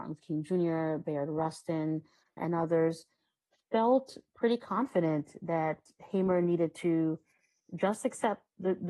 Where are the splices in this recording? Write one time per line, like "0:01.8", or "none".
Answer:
0:02.4
0:04.3